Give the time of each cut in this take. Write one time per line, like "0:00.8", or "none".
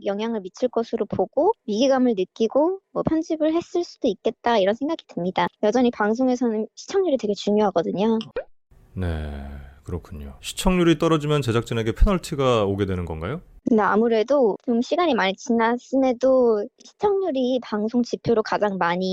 0:10.4